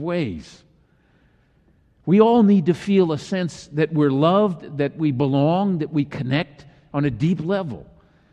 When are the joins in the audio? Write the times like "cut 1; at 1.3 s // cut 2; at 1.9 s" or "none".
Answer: none